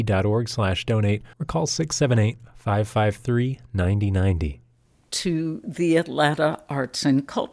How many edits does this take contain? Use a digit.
2